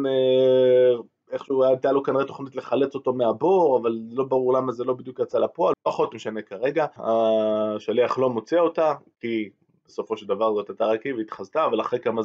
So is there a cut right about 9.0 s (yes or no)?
no